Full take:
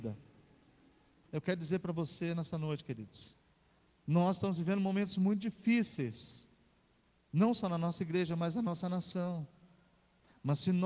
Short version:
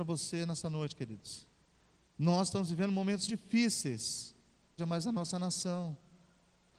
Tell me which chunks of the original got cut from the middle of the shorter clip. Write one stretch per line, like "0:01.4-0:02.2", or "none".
0:05.1-0:05.4
0:06.9-0:08.3